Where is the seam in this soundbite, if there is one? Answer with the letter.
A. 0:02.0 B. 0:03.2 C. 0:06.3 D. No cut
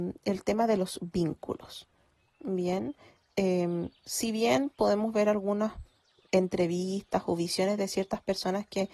D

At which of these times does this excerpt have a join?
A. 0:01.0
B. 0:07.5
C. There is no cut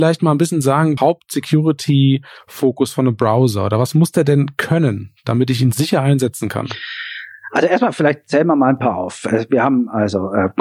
A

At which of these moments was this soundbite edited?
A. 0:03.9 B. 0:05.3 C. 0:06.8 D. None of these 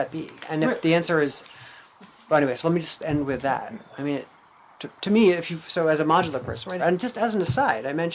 C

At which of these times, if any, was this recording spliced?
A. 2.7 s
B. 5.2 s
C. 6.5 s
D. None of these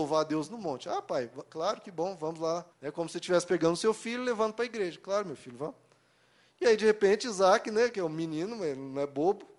A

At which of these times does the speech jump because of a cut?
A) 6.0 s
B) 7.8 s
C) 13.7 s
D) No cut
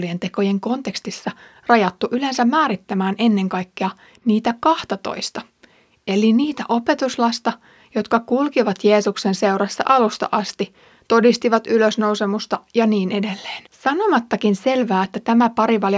C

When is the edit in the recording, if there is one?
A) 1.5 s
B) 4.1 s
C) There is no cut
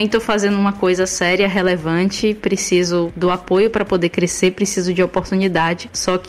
C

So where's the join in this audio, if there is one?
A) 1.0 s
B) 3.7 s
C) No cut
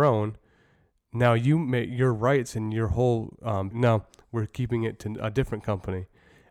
B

